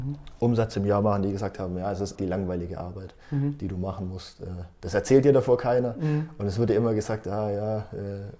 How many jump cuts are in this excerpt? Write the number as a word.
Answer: one